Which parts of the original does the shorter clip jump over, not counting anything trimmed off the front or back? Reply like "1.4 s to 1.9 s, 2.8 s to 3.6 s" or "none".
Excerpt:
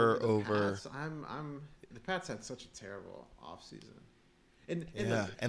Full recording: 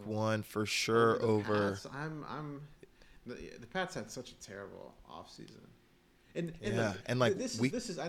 2.9 s to 3.6 s